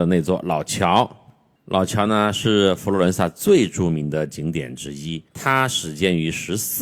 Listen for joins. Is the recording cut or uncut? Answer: cut